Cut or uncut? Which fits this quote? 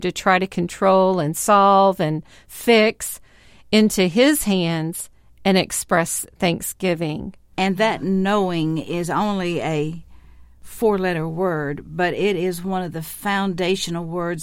cut